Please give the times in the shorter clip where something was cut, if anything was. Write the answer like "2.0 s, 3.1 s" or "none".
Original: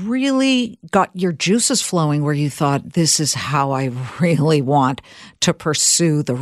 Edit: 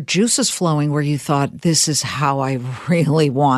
none